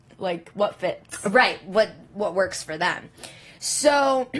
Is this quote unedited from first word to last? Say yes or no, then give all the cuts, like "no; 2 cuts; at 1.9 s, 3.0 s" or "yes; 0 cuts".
yes; 0 cuts